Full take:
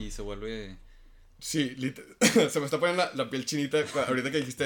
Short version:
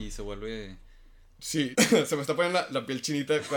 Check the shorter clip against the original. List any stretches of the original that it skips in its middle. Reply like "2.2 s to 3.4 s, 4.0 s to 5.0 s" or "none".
1.7 s to 2.2 s